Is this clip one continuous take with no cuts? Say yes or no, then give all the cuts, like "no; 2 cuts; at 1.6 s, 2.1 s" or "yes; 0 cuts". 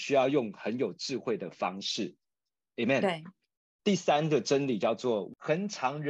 yes; 0 cuts